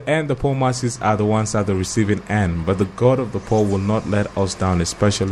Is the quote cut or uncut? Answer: uncut